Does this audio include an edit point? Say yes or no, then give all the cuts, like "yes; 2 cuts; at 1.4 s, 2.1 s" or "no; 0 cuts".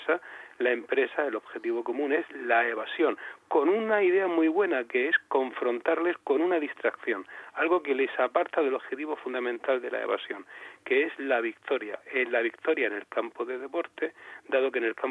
no; 0 cuts